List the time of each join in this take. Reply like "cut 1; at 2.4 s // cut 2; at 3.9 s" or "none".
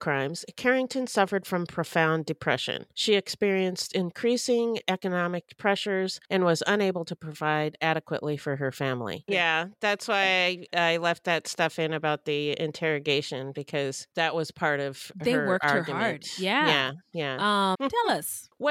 cut 1; at 9.3 s // cut 2; at 10.7 s // cut 3; at 17.7 s